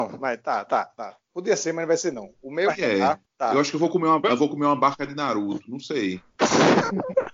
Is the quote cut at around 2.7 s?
yes; 1 cut; at 2.7 s

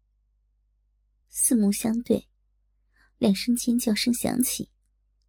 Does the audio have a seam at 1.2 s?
yes; 1 cut; at 1.2 s

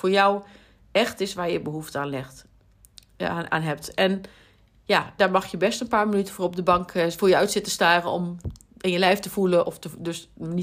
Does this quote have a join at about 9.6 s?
yes; 2 cuts; at 5.2 s, 9.6 s

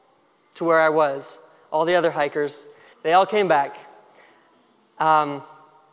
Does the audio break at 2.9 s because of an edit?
yes; 1 cut; at 2.9 s

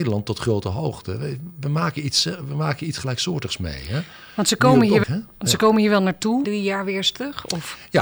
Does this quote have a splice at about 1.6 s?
no; 2 cuts; at 5.0 s, 6.4 s

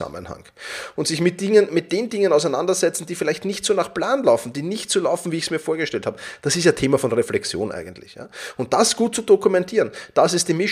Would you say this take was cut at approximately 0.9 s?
yes; 1 cut; at 0.9 s

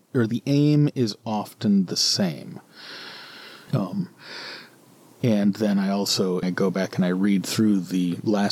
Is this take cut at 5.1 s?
no; 2 cuts; at 3.7 s, 6.4 s

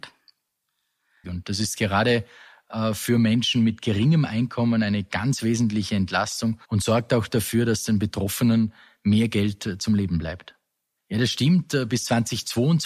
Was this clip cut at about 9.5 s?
no; 3 cuts; at 1.2 s, 6.6 s, 11.0 s

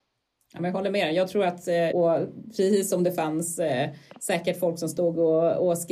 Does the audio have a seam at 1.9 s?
yes; 1 cut; at 1.9 s

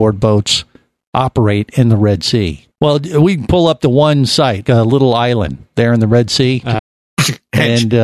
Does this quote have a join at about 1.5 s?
no; 3 cuts; at 2.7 s, 4.6 s, 6.8 s

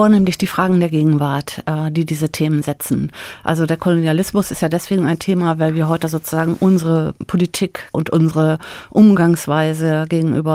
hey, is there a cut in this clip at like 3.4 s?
no; 0 cuts

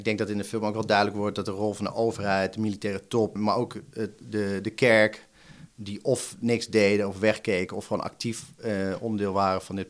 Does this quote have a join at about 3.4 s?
yes; 1 cut; at 3.4 s

